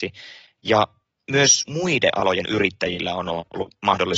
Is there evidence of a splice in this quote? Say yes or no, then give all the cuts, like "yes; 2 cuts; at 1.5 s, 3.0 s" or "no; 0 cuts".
no; 0 cuts